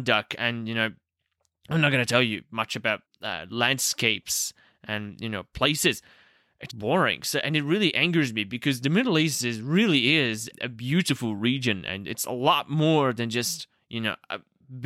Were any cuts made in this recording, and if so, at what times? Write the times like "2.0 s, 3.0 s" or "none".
3.0 s, 6.7 s, 10.5 s